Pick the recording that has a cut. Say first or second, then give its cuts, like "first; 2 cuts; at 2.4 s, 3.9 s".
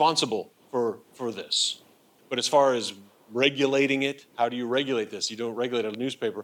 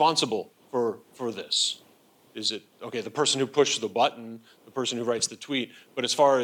first; 1 cut; at 2.2 s